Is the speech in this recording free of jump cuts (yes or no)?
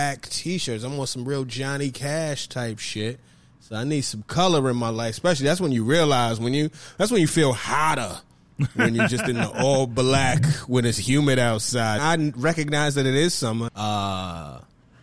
no